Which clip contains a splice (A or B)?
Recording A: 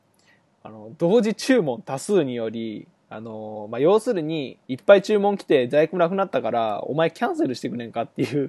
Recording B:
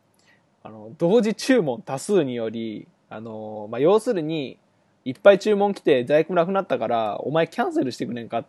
A